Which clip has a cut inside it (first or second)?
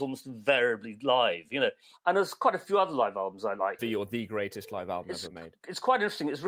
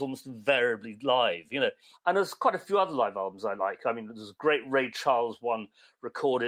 first